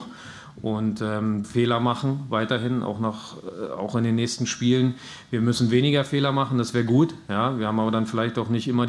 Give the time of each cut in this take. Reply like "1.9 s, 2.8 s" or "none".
1.4 s